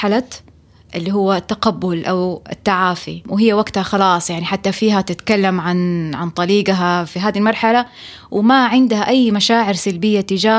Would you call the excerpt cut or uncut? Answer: uncut